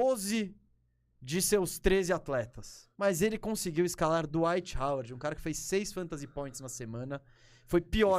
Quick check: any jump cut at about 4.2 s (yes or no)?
no